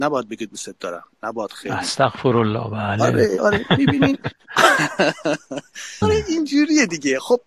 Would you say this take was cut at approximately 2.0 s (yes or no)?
no